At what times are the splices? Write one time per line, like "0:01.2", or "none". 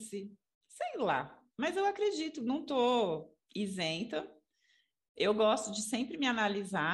none